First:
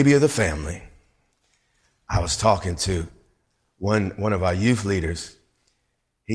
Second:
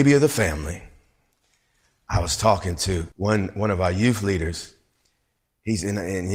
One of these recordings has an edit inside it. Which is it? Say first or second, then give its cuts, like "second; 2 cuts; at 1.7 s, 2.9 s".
second; 1 cut; at 3.1 s